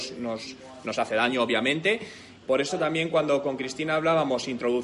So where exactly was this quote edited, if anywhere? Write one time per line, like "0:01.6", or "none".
0:02.4